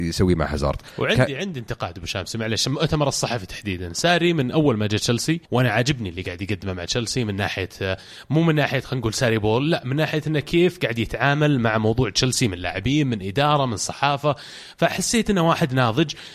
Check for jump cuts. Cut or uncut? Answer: cut